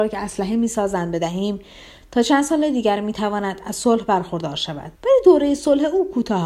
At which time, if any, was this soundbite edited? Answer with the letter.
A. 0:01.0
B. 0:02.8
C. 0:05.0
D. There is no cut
C